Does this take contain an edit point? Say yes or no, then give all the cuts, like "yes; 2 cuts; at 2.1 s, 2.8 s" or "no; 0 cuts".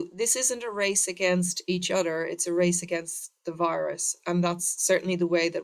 no; 0 cuts